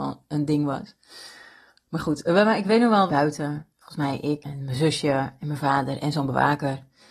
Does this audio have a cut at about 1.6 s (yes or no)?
no